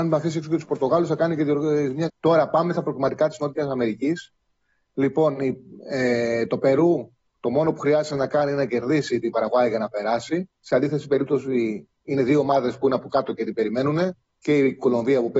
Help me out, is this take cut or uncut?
cut